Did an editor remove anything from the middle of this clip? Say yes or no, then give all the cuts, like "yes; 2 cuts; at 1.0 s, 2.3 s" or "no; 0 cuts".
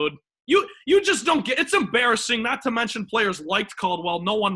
no; 0 cuts